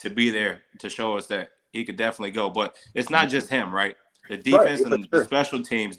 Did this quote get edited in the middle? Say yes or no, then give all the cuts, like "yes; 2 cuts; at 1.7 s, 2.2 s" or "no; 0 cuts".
no; 0 cuts